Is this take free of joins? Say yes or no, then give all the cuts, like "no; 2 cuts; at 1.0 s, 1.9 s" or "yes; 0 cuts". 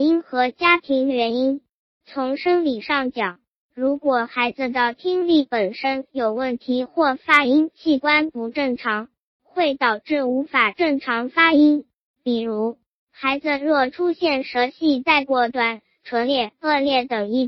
yes; 0 cuts